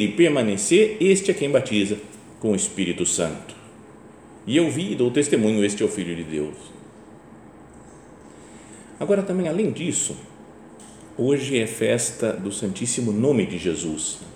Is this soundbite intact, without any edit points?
yes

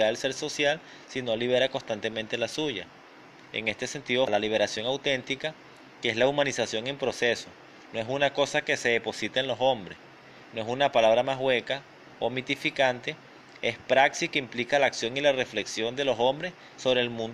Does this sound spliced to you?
yes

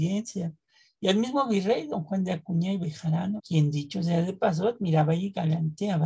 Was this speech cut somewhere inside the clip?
yes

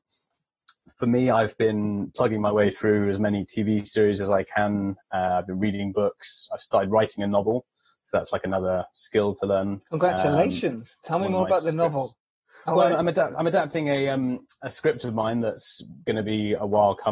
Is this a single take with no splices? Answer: yes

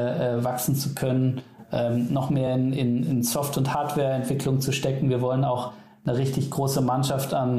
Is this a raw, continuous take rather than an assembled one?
yes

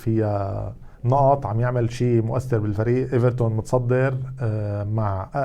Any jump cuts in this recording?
yes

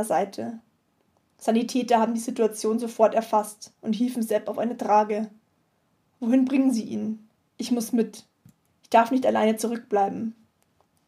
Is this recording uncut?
no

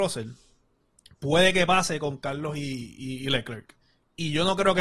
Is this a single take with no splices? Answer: yes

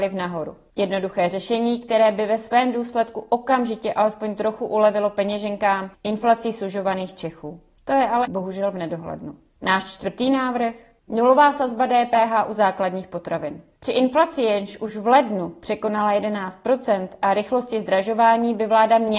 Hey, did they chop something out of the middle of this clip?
yes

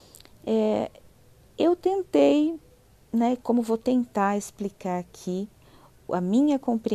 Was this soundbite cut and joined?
no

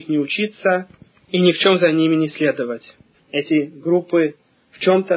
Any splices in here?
yes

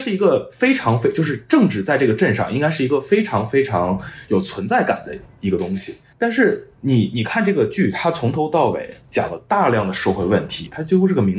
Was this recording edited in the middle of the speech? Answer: no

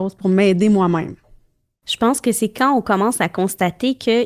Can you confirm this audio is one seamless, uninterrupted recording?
yes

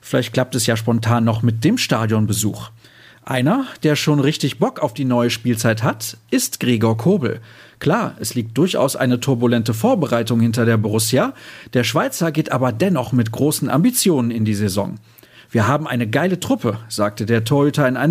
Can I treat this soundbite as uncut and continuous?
yes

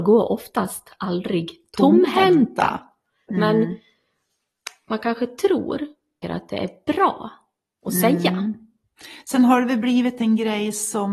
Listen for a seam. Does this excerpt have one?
yes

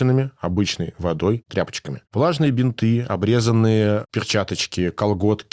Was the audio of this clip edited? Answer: yes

